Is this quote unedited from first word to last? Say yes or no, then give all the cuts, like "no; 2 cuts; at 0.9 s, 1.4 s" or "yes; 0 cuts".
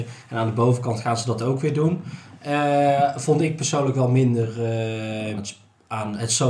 no; 1 cut; at 5.4 s